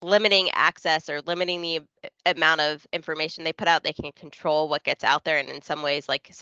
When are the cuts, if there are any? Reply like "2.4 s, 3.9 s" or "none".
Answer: none